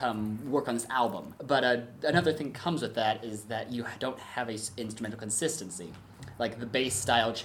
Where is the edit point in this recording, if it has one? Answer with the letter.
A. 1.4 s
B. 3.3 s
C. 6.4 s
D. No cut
A